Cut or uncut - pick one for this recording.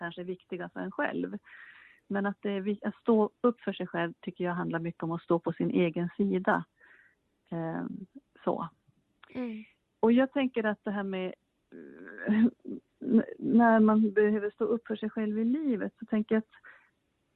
uncut